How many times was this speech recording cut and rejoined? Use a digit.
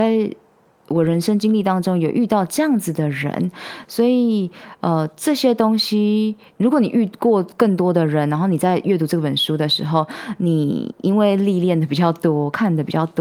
0